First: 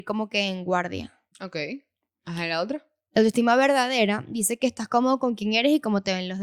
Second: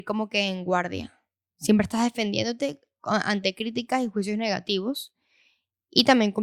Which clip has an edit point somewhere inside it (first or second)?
first